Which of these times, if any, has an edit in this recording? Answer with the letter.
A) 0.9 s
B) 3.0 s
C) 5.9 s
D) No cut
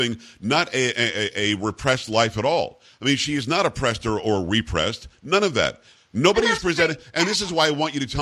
C